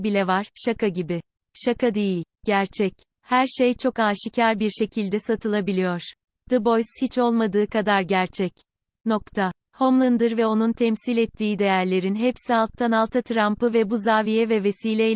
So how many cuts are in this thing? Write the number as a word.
zero